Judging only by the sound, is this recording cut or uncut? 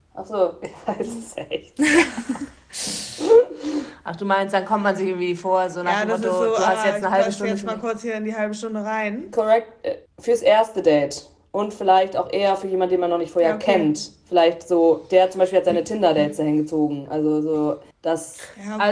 cut